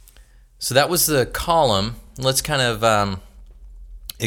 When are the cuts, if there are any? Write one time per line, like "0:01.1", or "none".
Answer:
none